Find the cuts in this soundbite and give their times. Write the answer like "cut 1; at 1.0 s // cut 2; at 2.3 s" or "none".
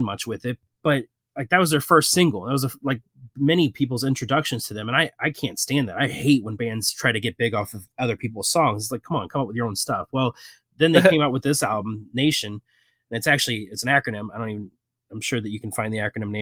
none